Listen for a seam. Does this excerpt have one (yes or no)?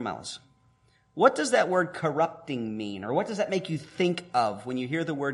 no